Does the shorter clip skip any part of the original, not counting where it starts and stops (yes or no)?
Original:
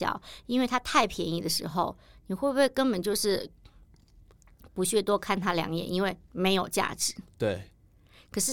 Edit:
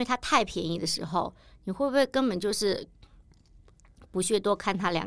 no